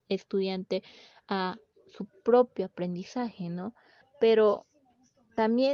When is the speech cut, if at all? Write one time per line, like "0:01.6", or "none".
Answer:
0:04.0